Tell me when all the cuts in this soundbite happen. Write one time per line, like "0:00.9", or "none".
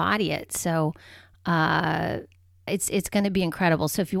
0:02.7